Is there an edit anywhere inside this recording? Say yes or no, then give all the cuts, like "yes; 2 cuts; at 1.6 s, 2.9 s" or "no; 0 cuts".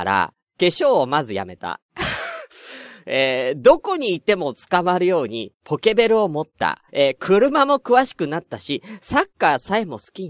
yes; 1 cut; at 6.9 s